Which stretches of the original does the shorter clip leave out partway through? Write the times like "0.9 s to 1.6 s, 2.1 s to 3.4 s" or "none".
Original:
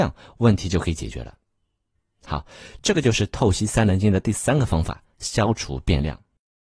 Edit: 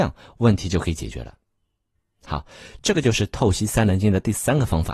none